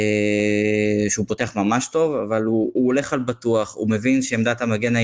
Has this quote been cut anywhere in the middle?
no; 0 cuts

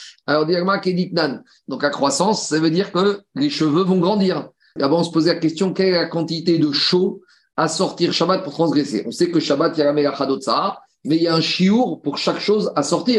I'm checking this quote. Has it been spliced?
yes; 2 cuts; at 1.6 s, 4.8 s

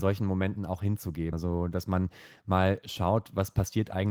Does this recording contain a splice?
yes; 1 cut; at 1.3 s

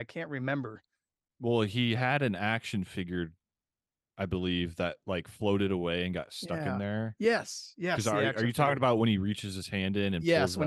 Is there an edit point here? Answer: no; 0 cuts

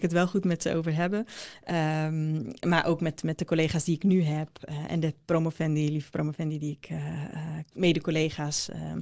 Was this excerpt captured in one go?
yes; 0 cuts

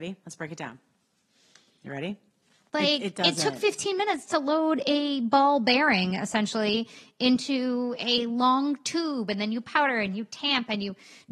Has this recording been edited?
yes; 1 cut; at 2.7 s

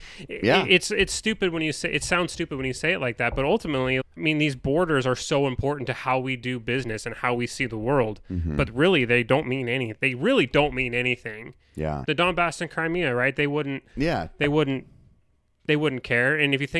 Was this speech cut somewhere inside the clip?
yes; 2 cuts; at 4.0 s, 12.0 s

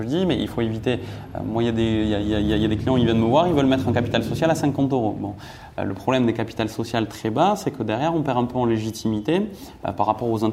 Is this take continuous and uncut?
yes; 0 cuts

